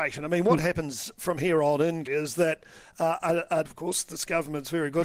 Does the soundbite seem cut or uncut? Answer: cut